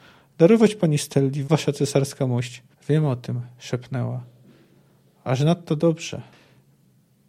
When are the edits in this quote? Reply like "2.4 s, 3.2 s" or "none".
1.4 s, 2.7 s